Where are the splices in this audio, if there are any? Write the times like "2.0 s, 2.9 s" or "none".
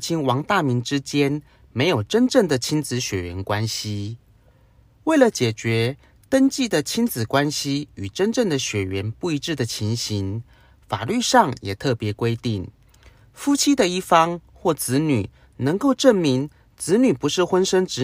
none